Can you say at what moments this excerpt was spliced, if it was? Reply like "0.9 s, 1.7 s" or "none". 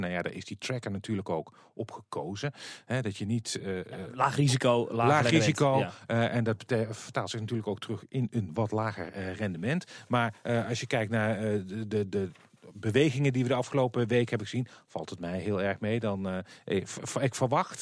none